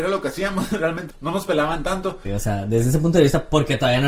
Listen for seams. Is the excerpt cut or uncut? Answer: cut